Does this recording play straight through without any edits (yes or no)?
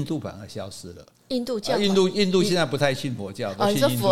yes